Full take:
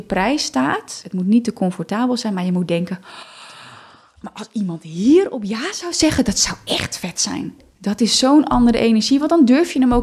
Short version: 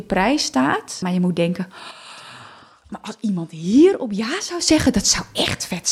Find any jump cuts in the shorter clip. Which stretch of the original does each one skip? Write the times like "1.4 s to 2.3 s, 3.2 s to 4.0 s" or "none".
1.0 s to 2.3 s

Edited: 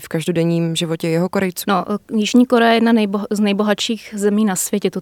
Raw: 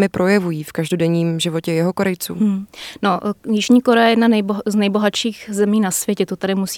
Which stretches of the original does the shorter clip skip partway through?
2.3 s to 3.0 s

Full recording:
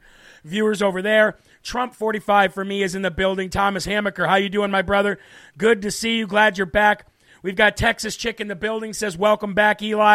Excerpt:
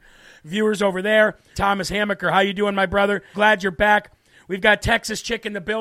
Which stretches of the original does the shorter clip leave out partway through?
1.5 s to 3.5 s, 5.3 s to 6.3 s

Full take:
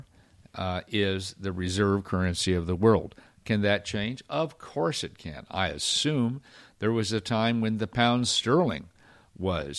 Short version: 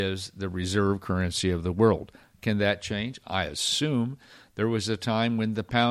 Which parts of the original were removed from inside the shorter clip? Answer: 4.3 s to 5.5 s

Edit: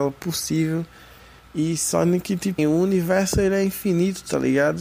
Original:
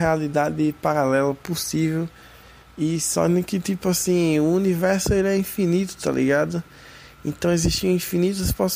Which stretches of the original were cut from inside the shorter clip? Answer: 3.8 s to 4.3 s

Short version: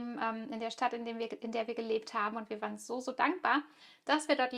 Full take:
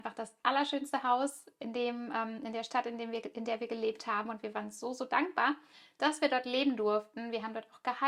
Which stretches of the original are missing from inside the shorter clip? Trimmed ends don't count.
none

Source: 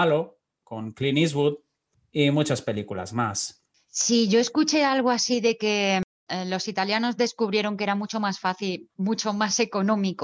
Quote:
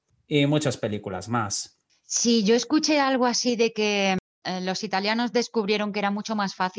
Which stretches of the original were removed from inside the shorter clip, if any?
none

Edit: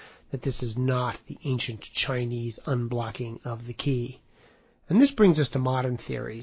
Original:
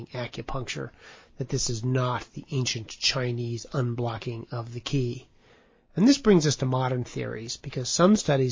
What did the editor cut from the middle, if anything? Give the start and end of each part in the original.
none

